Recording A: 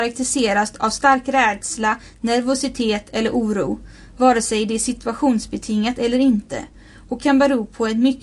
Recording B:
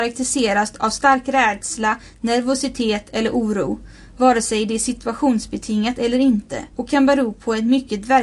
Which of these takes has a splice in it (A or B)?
B